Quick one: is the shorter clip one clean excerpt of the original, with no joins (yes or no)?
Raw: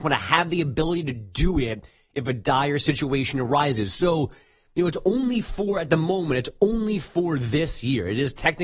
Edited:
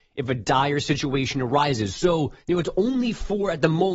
no